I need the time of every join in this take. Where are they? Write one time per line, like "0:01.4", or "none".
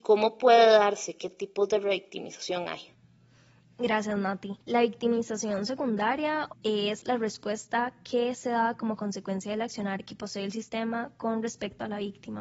0:04.6
0:06.5